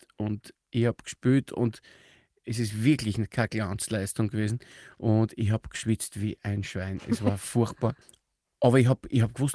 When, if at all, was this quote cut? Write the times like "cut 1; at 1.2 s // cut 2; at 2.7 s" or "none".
cut 1; at 8.0 s